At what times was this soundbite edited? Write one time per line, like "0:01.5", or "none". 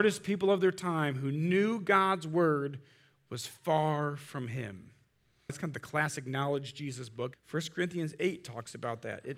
0:05.5
0:07.3